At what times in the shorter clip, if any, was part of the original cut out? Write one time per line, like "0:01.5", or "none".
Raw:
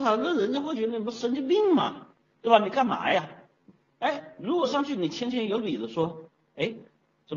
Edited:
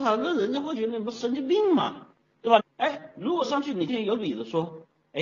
0:02.6
0:03.9